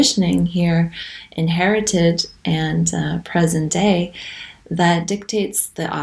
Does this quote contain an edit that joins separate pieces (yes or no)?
no